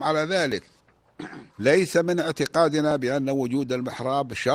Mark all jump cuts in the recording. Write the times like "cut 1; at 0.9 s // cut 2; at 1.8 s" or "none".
cut 1; at 1.5 s